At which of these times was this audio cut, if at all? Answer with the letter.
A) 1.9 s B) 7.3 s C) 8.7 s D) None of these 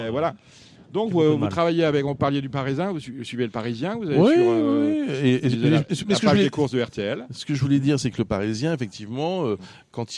D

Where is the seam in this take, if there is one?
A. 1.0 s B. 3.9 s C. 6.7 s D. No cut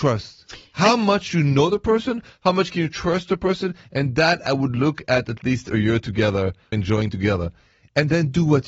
C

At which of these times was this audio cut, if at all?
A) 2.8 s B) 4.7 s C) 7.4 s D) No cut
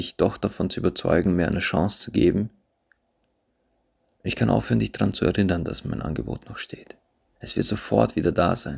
C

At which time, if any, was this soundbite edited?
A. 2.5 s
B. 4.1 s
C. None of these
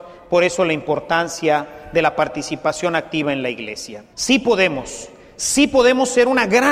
B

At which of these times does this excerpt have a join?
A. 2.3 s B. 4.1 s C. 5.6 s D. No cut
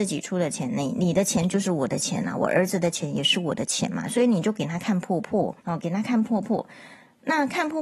C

